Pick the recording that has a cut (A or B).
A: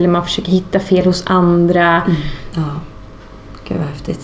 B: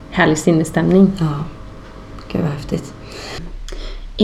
A